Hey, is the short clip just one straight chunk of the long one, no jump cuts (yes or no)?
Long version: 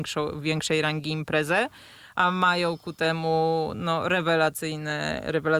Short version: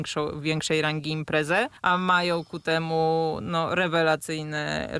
no